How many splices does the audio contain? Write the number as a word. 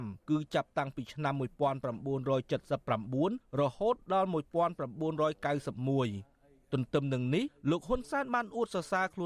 zero